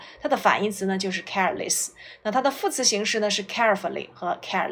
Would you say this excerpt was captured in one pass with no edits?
yes; 0 cuts

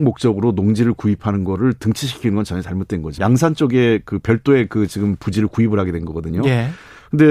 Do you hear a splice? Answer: yes; 1 cut; at 3.2 s

